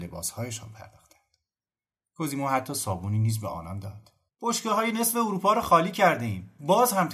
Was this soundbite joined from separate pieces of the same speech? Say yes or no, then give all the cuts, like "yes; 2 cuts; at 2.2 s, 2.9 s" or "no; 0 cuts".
yes; 1 cut; at 4.3 s